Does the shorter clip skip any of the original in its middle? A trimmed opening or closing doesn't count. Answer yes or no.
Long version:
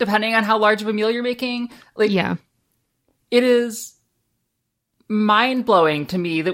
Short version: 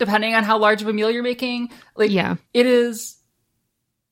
yes